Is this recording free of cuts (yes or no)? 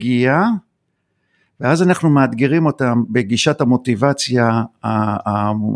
yes